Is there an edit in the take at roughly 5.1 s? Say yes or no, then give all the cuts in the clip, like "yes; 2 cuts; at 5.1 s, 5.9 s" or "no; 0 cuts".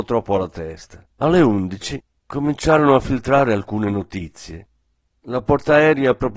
no; 1 cut; at 1.1 s